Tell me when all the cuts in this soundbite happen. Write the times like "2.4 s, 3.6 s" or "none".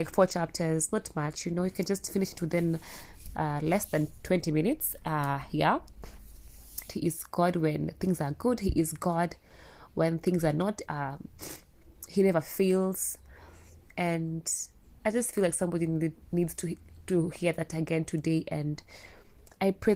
6.9 s, 10.9 s